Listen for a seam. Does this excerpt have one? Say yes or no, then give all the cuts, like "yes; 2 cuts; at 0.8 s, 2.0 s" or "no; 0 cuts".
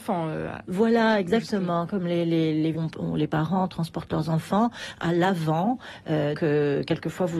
yes; 2 cuts; at 2.7 s, 6.4 s